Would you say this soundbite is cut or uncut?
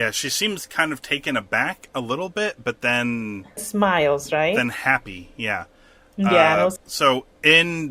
cut